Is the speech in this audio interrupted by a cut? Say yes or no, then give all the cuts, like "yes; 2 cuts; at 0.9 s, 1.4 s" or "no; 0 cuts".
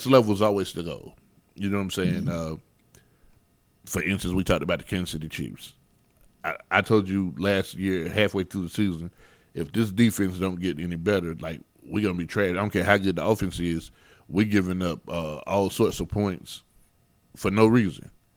no; 0 cuts